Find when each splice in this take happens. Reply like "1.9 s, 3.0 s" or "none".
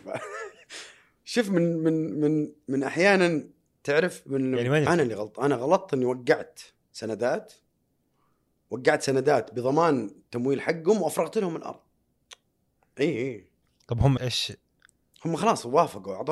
4.9 s, 14.2 s